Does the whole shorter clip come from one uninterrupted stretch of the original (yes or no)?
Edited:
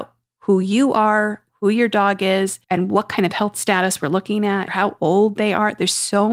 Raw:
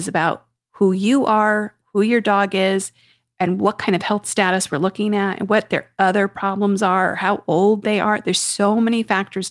no